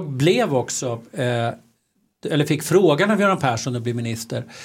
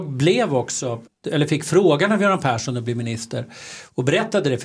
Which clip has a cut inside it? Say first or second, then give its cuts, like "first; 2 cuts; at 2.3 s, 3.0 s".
second; 1 cut; at 1.1 s